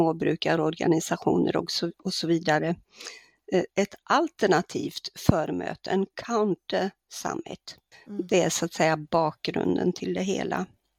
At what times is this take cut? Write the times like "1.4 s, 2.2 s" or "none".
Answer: 3.7 s, 7.9 s